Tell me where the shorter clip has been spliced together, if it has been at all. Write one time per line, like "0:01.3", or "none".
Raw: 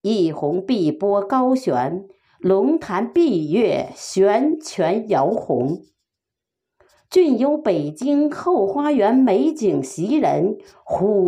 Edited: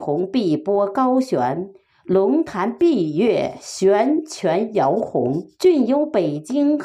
0:05.5